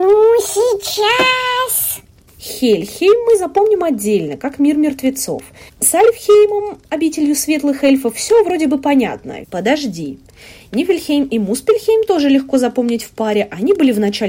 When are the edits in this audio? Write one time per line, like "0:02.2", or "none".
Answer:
0:05.7
0:09.4